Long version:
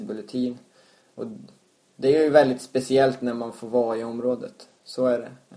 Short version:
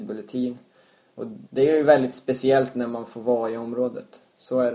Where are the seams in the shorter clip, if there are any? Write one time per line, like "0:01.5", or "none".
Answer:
0:01.4